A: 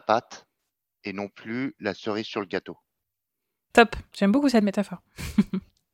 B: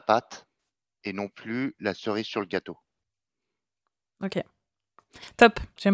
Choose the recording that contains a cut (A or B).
A